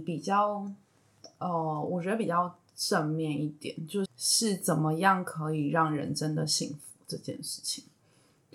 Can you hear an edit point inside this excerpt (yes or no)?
yes